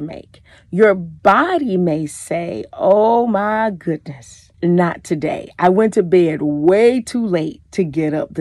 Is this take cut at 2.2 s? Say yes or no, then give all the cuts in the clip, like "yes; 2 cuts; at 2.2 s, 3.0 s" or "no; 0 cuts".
no; 1 cut; at 4.5 s